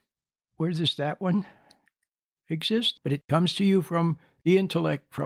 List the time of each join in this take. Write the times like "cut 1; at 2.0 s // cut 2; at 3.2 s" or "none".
cut 1; at 3.0 s